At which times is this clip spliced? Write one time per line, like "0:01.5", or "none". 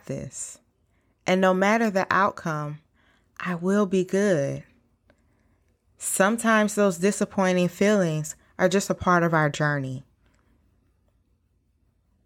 none